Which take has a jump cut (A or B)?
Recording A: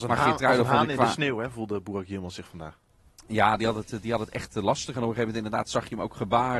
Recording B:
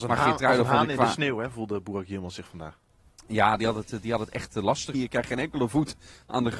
B